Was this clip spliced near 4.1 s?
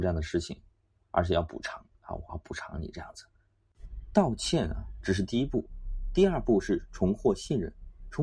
no; 1 cut; at 2.3 s

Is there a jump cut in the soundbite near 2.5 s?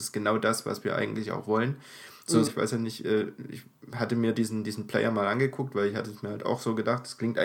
yes; 1 cut; at 2.5 s

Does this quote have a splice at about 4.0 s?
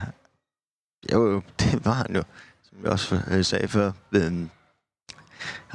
no; 1 cut; at 1.6 s

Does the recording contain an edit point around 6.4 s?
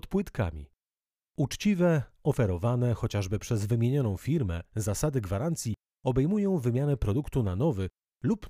no; 1 cut; at 1.2 s

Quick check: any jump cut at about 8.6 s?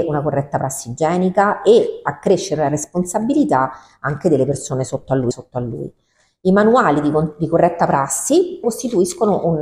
yes; 2 cuts; at 5.3 s, 8.6 s

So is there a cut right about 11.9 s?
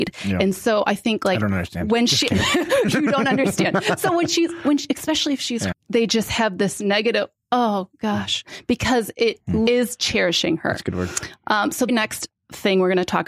yes; 3 cuts; at 5.7 s, 9.7 s, 11.9 s

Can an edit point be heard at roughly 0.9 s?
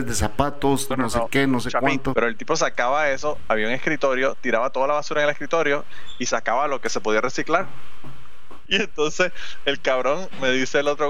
yes; 3 cuts; at 0.9 s, 2.1 s, 8.7 s

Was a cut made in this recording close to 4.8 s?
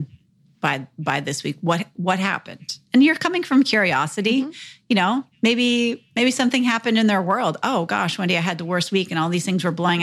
no; 0 cuts

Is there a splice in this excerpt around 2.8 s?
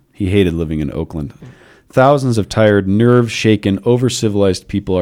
no; 1 cut; at 1.4 s

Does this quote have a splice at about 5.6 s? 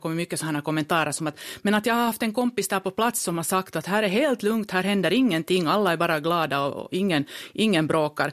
no; 0 cuts

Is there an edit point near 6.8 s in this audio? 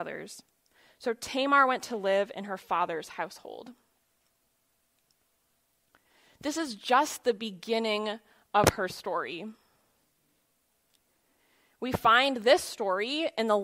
no; 0 cuts

